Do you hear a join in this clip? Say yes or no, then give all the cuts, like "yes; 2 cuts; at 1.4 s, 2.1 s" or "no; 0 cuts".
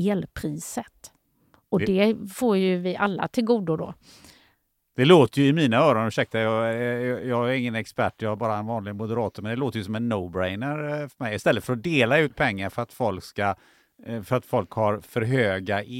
no; 0 cuts